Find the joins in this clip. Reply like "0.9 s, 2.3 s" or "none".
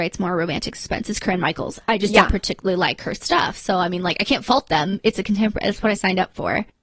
none

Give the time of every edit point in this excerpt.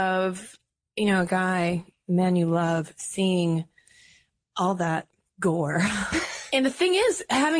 6.5 s

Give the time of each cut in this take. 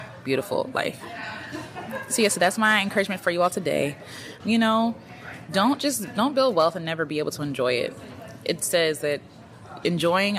4.4 s

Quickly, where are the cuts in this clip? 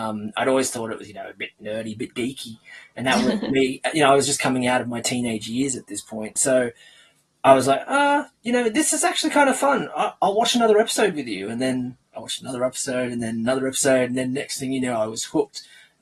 none

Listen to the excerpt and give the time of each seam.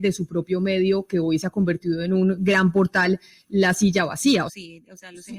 4.5 s

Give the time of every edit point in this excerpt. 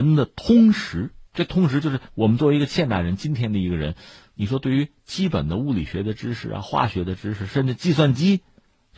1.3 s

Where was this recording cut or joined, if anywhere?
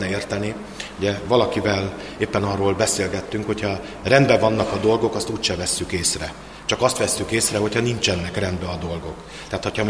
none

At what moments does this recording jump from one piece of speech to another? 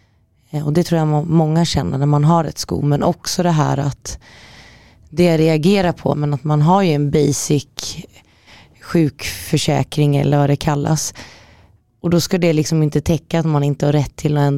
6.1 s

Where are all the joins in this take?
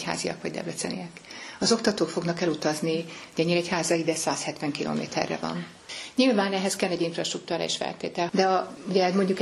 8.3 s

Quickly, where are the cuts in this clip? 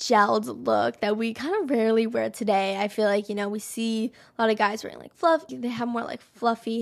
5.5 s

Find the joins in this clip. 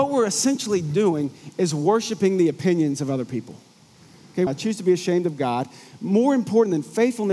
4.5 s

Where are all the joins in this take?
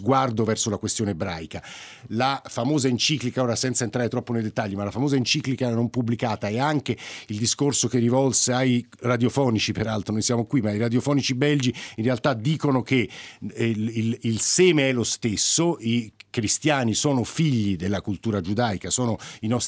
2.0 s

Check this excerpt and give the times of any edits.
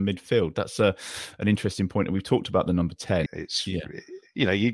3.3 s

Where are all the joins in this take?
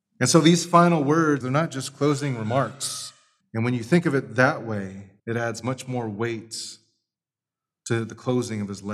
1.4 s, 3.4 s, 5.2 s

